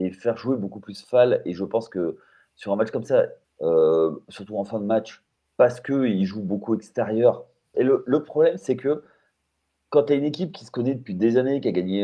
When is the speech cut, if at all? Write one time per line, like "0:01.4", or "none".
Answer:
0:03.4
0:07.7